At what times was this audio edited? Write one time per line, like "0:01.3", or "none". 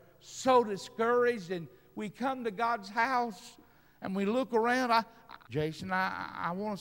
0:05.5